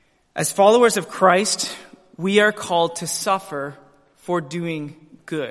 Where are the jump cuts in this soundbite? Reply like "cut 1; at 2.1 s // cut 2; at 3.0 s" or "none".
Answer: none